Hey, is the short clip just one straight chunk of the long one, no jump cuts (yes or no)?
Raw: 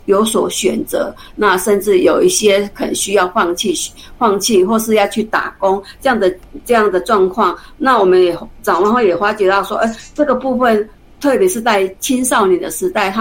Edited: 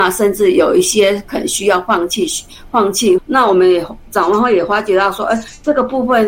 no